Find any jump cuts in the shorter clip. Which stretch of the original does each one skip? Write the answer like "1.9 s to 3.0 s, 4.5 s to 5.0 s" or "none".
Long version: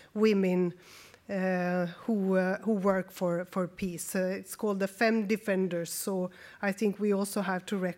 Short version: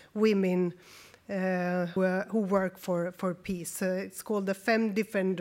2.0 s to 2.3 s